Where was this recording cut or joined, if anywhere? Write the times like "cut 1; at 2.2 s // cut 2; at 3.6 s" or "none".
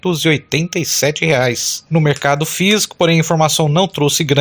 none

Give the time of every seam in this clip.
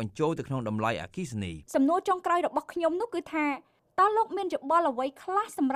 cut 1; at 1.7 s

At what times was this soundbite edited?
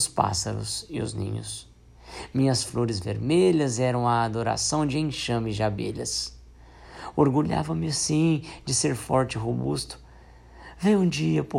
none

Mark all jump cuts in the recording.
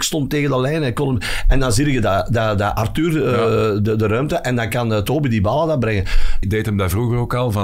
cut 1; at 6.4 s

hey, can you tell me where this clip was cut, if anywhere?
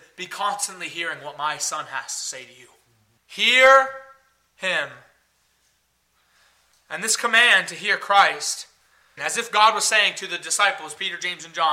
cut 1; at 3.2 s // cut 2; at 9.2 s

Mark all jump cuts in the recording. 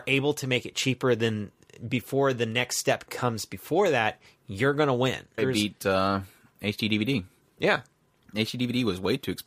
cut 1; at 5.4 s

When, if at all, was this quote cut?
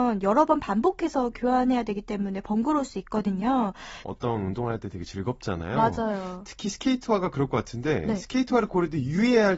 cut 1; at 4.0 s

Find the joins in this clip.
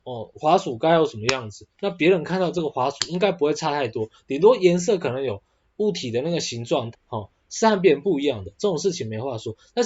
cut 1; at 5.7 s // cut 2; at 6.9 s // cut 3; at 8.6 s

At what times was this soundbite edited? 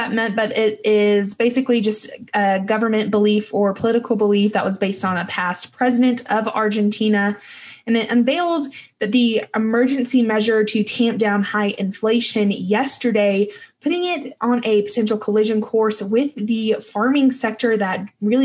none

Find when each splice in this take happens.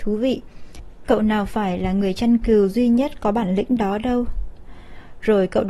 none

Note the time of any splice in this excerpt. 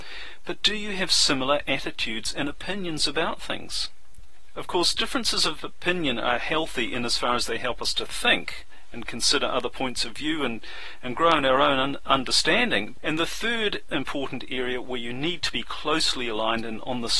cut 1; at 13.0 s

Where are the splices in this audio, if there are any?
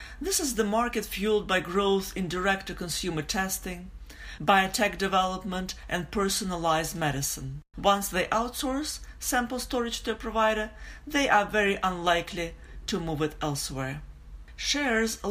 cut 1; at 4.4 s // cut 2; at 7.7 s

